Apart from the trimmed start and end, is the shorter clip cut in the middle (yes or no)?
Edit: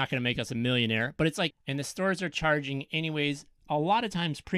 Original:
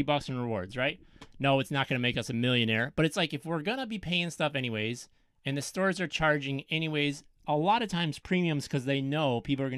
yes